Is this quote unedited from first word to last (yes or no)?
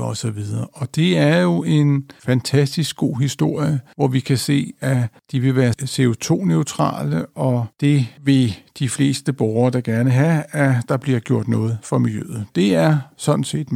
yes